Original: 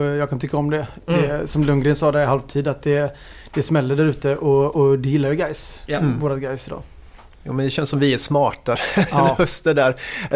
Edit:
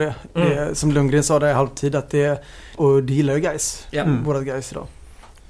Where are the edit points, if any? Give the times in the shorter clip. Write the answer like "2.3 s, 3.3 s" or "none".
2.8 s